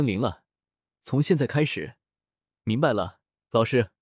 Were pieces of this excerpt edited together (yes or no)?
yes